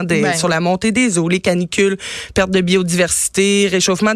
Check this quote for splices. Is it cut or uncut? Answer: uncut